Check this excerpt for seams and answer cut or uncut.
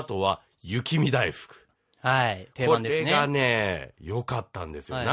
uncut